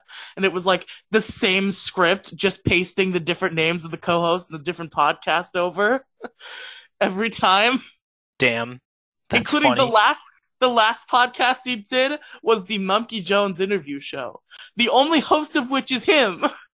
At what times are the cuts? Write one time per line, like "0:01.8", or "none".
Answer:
none

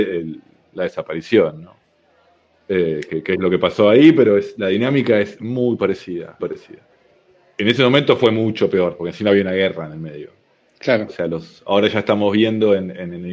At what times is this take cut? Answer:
0:06.4
0:11.1

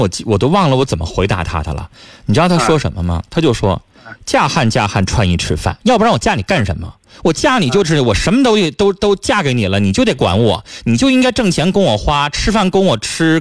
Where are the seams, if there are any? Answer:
none

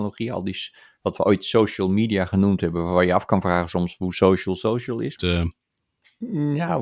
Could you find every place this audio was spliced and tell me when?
0:05.2

